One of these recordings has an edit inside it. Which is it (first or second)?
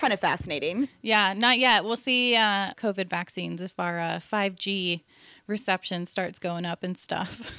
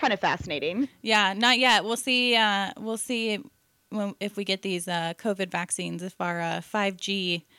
first